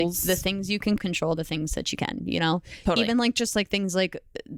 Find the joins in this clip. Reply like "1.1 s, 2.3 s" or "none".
1.0 s